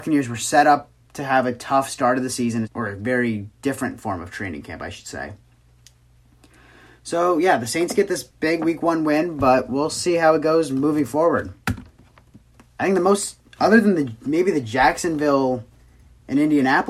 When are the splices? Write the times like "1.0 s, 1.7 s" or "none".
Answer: 2.6 s, 11.6 s